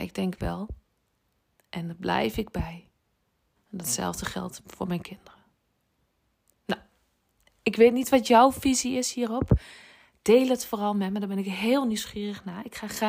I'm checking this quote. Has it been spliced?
yes; 2 cuts; at 3.6 s, 6.5 s

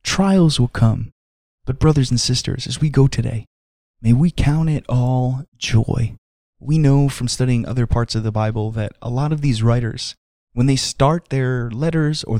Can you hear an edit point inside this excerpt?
no; 0 cuts

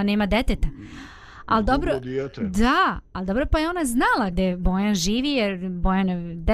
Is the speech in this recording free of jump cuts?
no; 1 cut; at 4.3 s

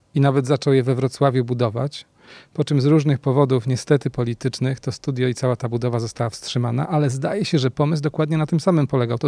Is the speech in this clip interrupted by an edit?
no; 0 cuts

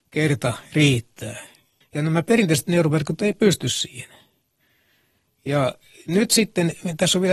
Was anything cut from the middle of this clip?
yes; 1 cut; at 1.8 s

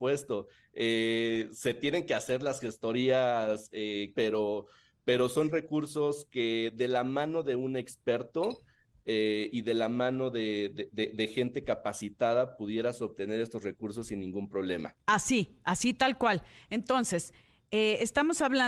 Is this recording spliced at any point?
yes; 1 cut; at 4.1 s

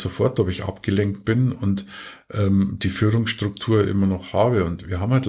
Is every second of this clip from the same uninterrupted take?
yes; 0 cuts

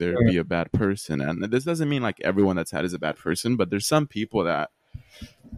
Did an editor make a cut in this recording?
no; 0 cuts

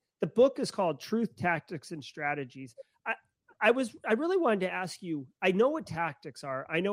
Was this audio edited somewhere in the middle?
no; 0 cuts

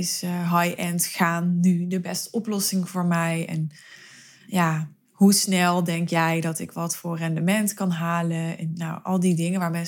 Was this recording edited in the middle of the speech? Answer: no; 0 cuts

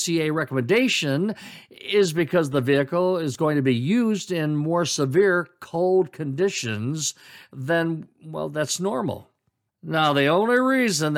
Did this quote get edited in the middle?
yes; 1 cut; at 9.7 s

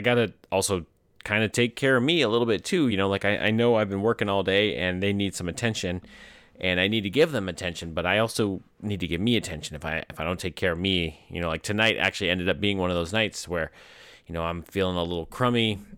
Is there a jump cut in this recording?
no; 0 cuts

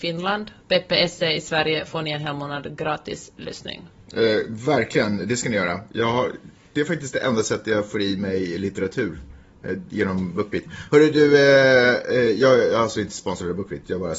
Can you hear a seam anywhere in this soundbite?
no; 0 cuts

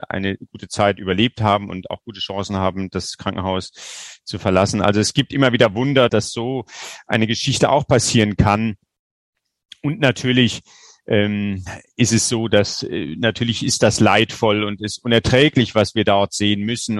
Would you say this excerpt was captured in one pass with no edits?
no; 1 cut; at 6.1 s

